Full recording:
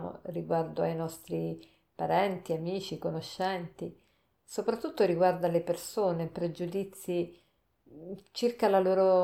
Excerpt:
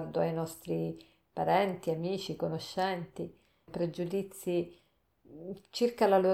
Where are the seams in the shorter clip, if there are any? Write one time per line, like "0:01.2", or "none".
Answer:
0:03.7